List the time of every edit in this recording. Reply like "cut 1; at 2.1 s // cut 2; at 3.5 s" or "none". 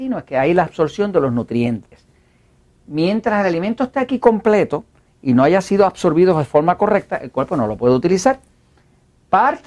none